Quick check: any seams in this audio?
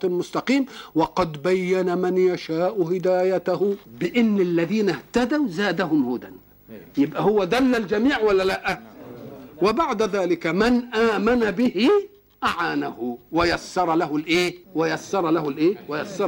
yes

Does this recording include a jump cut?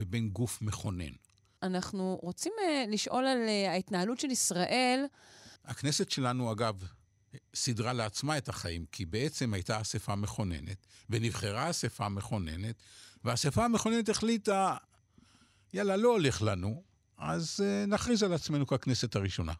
yes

